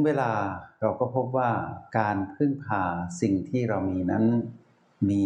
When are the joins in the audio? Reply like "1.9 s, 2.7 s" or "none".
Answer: 1.9 s